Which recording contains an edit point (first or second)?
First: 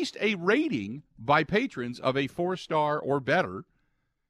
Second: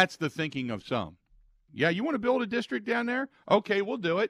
second